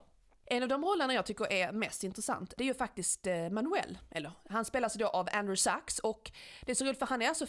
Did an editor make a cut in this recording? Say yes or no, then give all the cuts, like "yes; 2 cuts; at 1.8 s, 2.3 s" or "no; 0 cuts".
no; 0 cuts